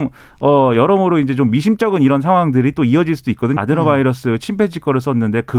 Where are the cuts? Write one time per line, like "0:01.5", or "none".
0:03.6